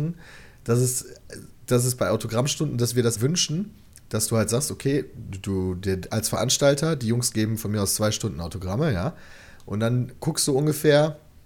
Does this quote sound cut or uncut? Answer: cut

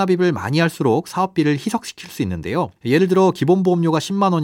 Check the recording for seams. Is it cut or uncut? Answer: cut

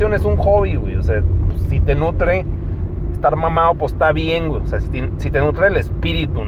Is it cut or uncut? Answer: uncut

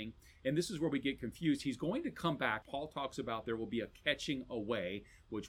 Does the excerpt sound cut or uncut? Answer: cut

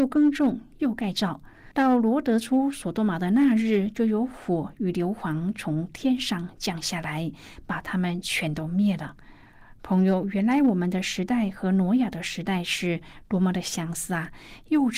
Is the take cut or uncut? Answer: cut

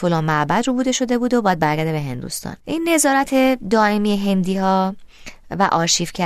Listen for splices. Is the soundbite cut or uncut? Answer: cut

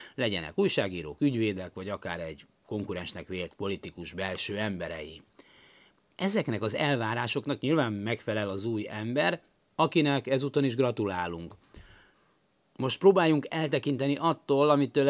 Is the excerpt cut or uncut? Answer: uncut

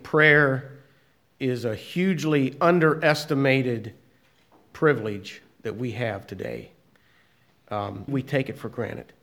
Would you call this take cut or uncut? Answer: cut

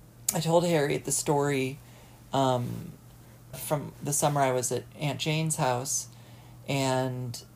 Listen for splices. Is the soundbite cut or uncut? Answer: cut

